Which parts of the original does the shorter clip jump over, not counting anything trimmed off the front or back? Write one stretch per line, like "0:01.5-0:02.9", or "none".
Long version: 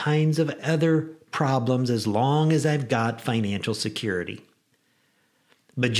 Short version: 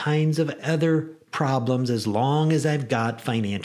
none